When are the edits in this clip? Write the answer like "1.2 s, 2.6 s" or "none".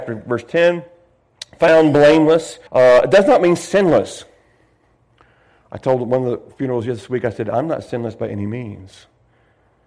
2.7 s